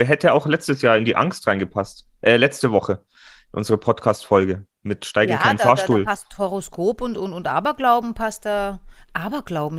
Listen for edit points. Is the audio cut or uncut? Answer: uncut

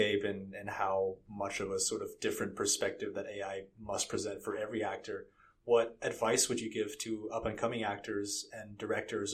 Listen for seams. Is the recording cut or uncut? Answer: uncut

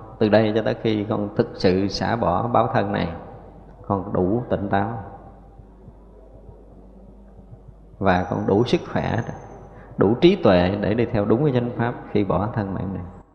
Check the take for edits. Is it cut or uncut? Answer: uncut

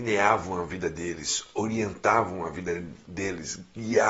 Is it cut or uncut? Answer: uncut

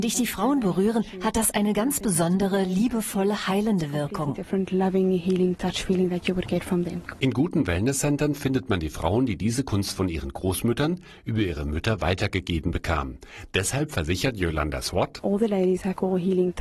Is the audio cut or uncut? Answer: uncut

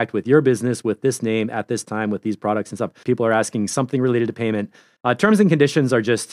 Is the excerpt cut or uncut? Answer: cut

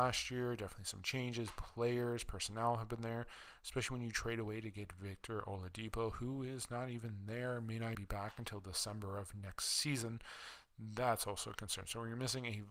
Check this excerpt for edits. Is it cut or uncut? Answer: cut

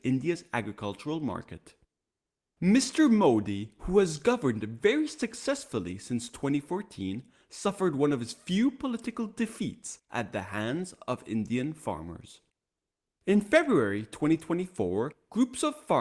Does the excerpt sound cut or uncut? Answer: uncut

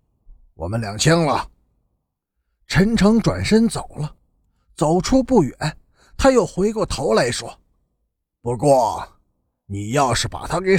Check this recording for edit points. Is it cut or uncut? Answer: uncut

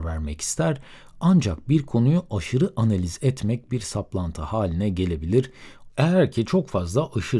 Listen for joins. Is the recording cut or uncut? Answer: cut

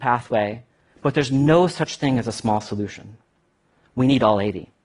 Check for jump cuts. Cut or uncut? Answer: uncut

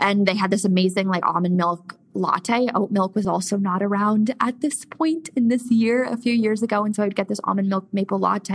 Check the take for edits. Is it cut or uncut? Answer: uncut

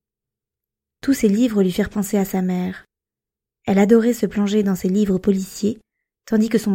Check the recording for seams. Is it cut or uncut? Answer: uncut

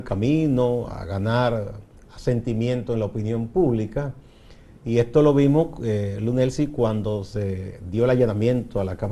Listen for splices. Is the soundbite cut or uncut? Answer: uncut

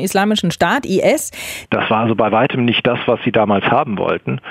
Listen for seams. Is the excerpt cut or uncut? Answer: cut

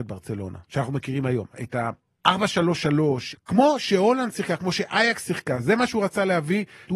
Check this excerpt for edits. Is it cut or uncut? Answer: cut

